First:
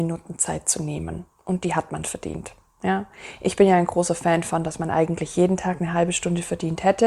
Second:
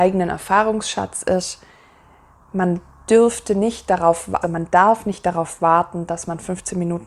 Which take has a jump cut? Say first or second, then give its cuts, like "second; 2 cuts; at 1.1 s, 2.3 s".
second; 1 cut; at 4.4 s